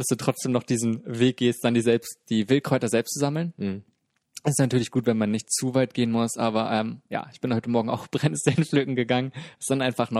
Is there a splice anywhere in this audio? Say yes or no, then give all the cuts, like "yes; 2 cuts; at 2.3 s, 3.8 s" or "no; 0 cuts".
no; 0 cuts